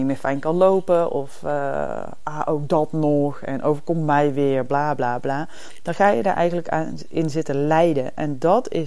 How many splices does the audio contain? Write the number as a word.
zero